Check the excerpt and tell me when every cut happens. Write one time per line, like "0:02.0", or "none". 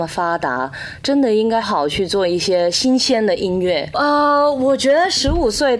0:01.6
0:03.9